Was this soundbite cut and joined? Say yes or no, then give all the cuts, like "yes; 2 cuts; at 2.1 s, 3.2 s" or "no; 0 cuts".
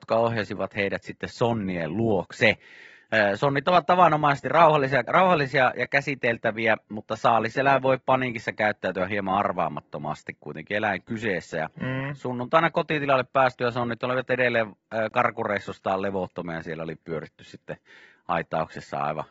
yes; 1 cut; at 5.0 s